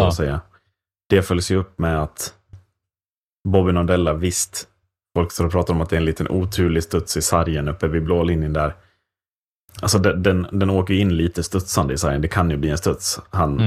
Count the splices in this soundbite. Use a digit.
1